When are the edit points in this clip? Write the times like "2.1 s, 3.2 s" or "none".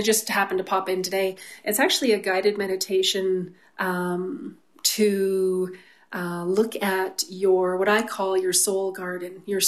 none